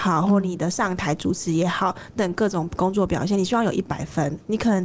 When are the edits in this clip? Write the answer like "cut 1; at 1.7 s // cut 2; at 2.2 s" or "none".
cut 1; at 2.2 s